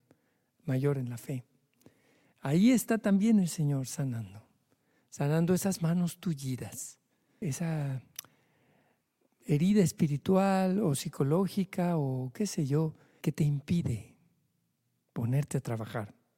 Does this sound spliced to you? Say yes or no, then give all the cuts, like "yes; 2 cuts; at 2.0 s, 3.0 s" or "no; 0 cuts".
yes; 2 cuts; at 7.4 s, 13.2 s